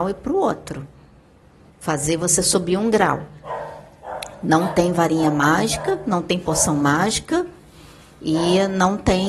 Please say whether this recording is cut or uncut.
cut